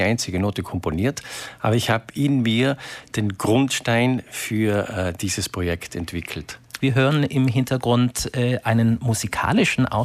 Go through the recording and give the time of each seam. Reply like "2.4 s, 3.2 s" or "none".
6.8 s